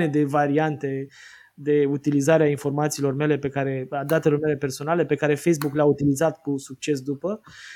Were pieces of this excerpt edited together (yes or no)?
no